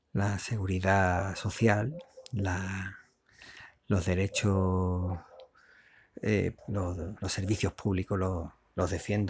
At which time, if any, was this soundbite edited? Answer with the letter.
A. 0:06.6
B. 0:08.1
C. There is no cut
A